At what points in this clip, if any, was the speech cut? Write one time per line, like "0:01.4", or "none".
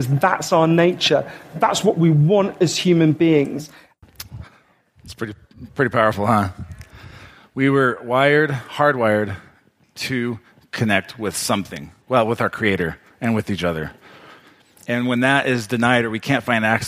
none